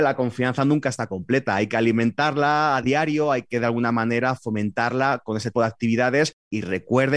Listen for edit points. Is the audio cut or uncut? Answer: cut